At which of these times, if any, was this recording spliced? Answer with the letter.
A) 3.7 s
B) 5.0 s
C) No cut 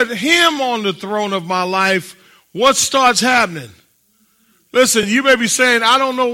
C